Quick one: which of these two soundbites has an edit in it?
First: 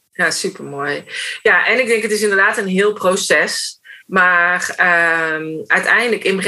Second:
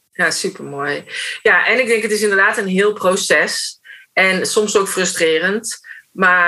first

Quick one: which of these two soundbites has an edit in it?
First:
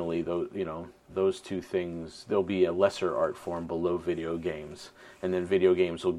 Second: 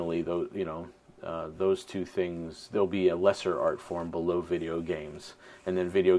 first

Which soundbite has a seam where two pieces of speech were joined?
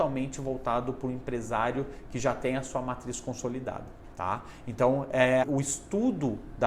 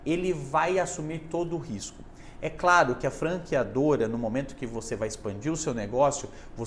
first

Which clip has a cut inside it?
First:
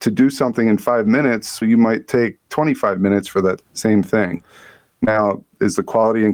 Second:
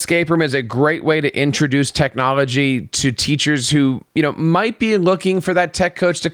first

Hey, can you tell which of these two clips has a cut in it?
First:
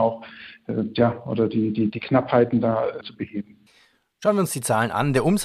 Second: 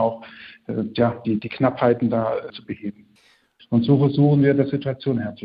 second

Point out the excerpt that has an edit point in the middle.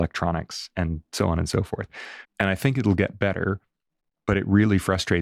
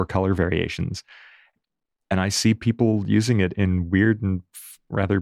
first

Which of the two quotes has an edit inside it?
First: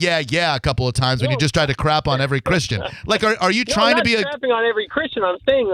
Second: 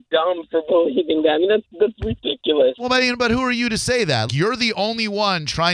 second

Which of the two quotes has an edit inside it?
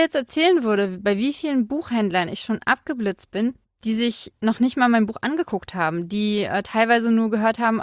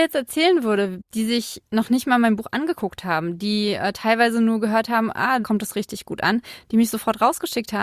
second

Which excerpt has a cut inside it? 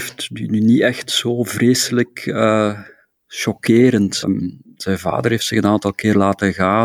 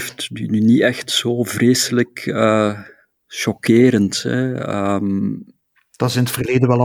first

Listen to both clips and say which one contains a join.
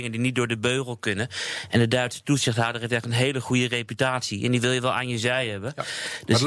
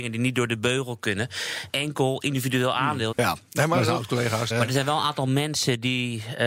second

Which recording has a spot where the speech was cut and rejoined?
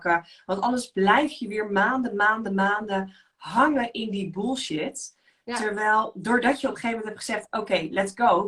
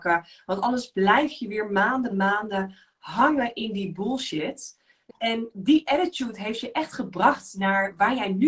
second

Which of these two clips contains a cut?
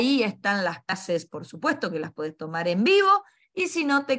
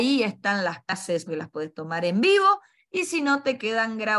second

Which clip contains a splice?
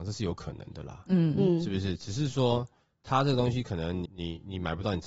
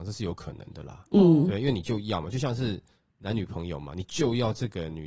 first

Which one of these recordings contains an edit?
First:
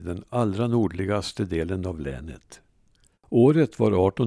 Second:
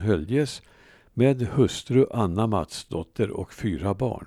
first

